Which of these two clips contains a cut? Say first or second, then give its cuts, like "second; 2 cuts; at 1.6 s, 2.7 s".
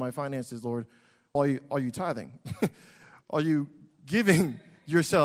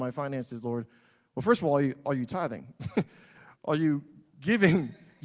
first; 1 cut; at 1.4 s